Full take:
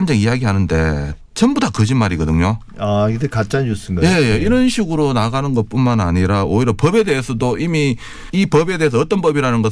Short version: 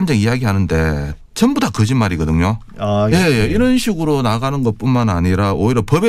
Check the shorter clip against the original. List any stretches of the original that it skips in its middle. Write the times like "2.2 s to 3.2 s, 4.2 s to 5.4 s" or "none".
3.1 s to 4.0 s